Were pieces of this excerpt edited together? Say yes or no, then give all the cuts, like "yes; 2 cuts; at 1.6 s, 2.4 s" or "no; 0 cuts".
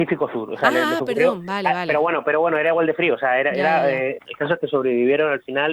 yes; 1 cut; at 4.2 s